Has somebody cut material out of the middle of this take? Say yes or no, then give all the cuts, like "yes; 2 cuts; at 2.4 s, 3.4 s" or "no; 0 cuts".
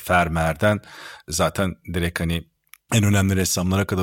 no; 0 cuts